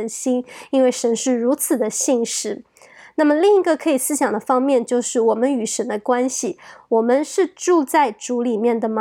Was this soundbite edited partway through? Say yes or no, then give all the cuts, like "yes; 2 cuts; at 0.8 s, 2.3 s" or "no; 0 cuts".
no; 0 cuts